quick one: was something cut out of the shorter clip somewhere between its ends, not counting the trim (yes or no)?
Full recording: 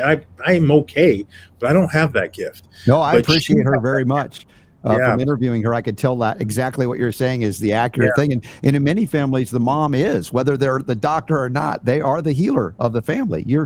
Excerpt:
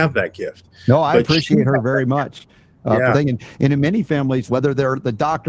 yes